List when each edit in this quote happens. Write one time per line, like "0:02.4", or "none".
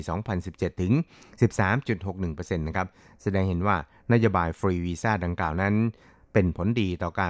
none